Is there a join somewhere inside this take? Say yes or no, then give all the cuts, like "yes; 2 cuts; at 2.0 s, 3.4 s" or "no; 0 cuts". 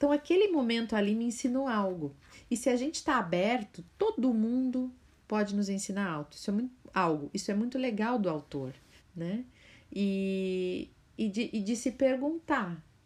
yes; 1 cut; at 9.0 s